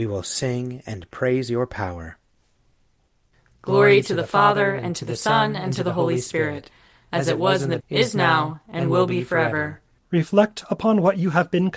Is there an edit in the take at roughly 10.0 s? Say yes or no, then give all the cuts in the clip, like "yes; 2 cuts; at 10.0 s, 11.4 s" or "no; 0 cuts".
yes; 2 cuts; at 7.8 s, 10.0 s